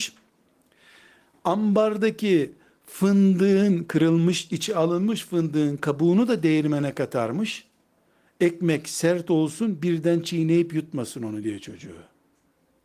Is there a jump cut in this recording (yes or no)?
no